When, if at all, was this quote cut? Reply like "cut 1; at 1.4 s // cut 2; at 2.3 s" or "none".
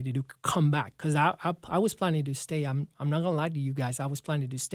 none